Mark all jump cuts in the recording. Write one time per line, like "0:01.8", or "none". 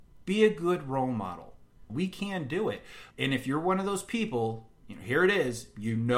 0:01.9
0:03.1